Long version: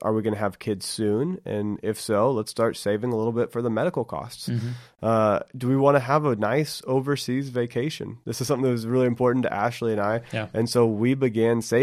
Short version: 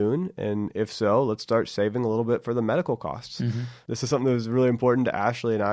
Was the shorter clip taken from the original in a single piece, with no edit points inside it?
no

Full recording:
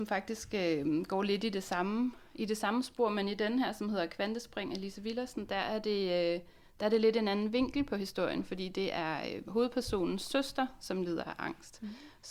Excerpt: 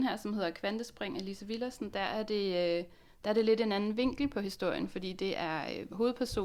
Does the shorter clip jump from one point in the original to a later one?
no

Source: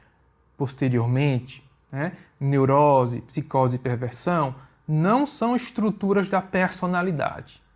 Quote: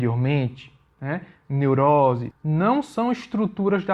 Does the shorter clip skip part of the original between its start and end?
yes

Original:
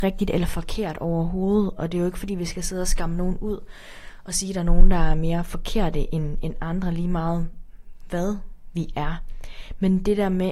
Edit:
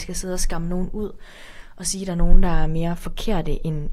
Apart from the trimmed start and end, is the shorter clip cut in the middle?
no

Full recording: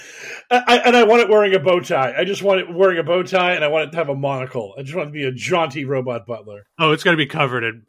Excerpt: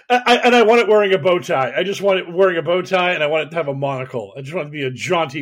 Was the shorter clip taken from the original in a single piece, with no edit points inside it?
yes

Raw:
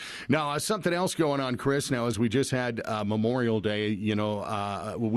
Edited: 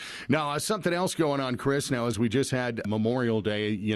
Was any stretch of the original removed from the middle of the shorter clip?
yes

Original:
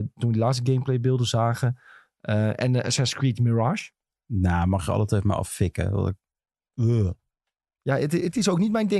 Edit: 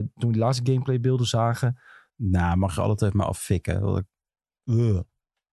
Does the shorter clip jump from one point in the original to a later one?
yes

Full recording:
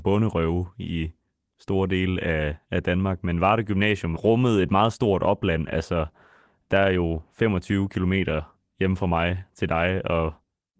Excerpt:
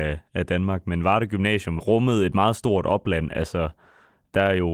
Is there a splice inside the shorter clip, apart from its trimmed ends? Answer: no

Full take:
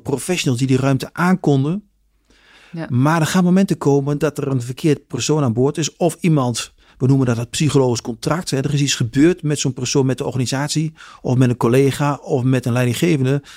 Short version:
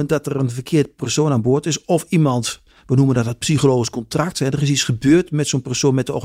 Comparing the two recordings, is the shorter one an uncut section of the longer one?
yes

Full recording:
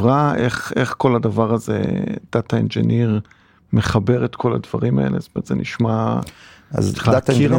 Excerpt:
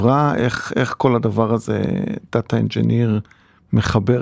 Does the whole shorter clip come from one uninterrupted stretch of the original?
yes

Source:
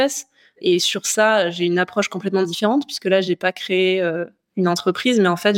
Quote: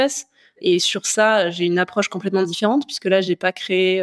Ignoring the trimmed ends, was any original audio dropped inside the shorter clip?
no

